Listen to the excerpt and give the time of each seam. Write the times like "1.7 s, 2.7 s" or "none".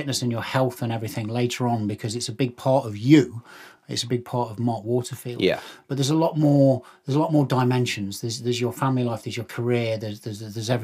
none